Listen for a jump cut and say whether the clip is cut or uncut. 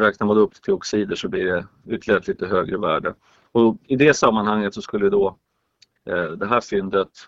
uncut